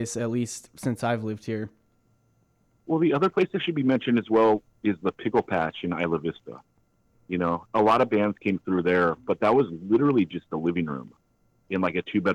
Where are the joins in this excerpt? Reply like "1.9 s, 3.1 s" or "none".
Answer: none